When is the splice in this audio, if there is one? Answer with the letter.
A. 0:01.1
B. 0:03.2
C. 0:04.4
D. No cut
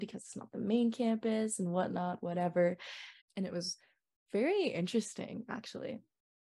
B